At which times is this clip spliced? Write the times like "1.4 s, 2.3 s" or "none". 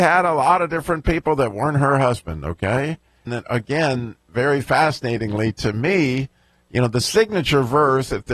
3.3 s